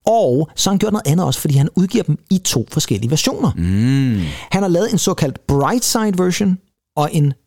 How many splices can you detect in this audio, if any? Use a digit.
0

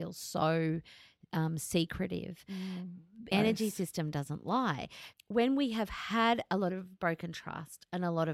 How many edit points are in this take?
2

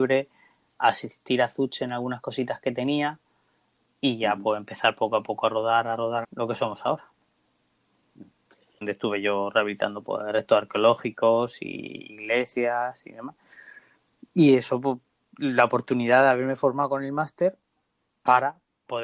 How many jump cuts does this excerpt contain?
2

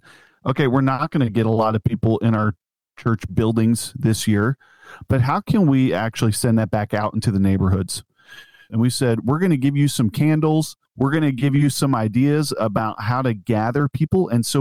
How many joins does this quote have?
2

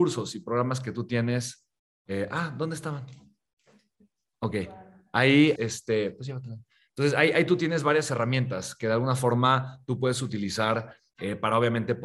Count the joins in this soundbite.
1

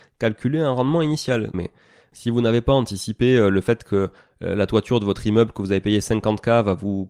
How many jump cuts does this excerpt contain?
1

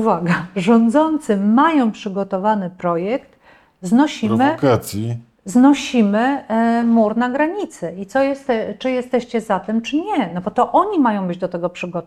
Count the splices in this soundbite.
0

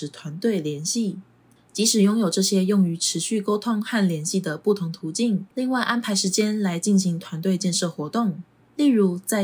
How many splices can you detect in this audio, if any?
1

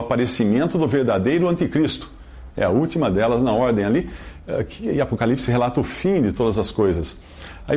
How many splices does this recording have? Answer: 1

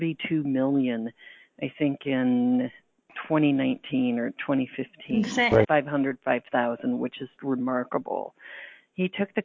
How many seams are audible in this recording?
2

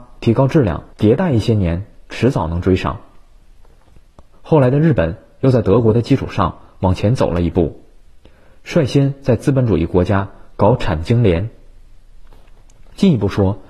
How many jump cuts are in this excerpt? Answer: 2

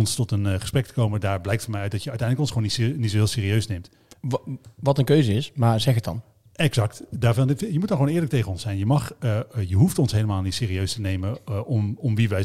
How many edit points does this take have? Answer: 0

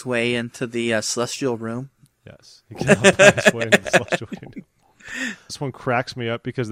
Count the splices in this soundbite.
1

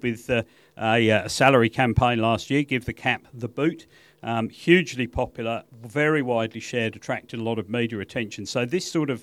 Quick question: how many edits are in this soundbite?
0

